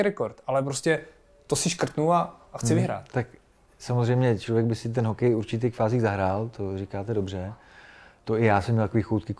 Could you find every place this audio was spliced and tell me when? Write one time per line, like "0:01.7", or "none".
none